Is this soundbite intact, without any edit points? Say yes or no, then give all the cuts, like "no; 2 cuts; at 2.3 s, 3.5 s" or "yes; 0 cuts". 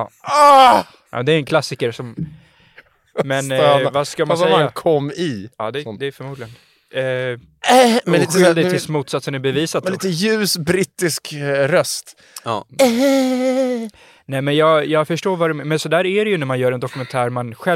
yes; 0 cuts